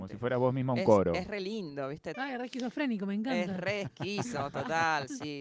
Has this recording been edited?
yes; 1 cut; at 2.1 s

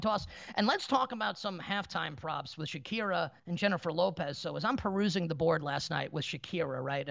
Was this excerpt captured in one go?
no; 1 cut; at 3.4 s

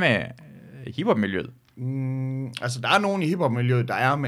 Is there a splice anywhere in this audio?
no; 0 cuts

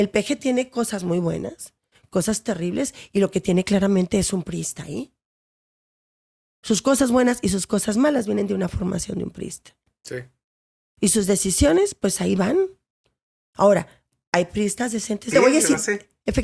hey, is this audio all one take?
no; 1 cut; at 15.3 s

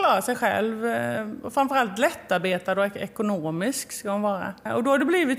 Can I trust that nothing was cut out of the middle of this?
yes; 0 cuts

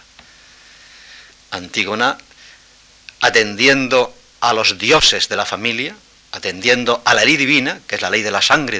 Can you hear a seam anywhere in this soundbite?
yes; 1 cut; at 1.3 s

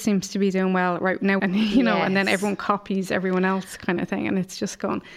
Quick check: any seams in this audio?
yes; 1 cut; at 1.4 s

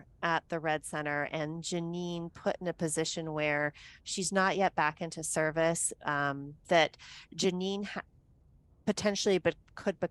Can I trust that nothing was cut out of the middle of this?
no; 1 cut; at 6.6 s

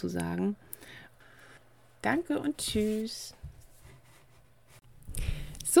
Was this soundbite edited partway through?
no; 0 cuts

